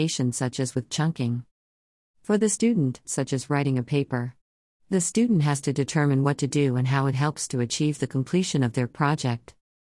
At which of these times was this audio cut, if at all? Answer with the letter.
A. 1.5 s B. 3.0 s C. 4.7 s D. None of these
B